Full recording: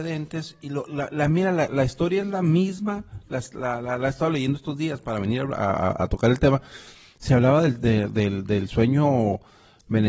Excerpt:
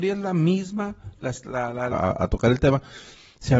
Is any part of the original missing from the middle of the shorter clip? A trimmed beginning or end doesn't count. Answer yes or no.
yes